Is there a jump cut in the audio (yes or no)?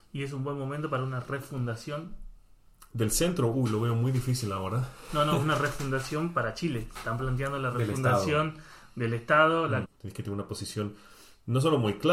yes